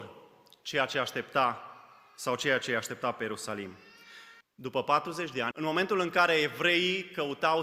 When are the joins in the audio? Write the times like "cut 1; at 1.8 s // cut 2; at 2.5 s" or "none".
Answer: cut 1; at 4.4 s // cut 2; at 5.5 s